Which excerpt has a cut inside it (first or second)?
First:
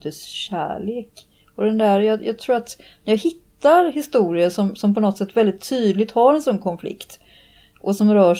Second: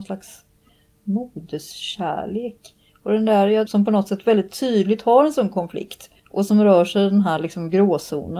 second